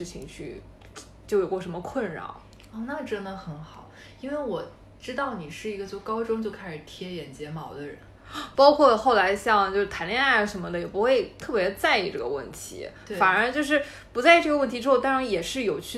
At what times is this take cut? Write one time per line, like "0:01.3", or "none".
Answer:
0:08.6